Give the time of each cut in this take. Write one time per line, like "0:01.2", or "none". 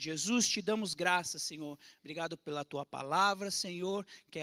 none